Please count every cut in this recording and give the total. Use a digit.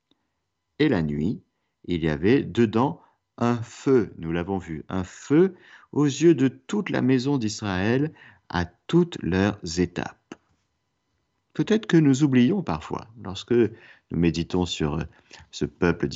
0